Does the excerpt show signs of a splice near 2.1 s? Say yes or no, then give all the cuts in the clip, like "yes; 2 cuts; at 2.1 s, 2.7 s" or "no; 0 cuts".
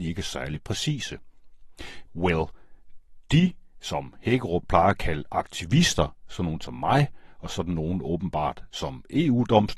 yes; 1 cut; at 2.1 s